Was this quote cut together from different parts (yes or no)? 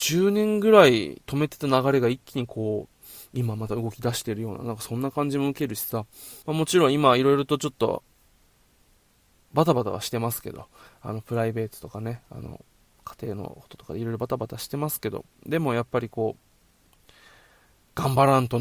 yes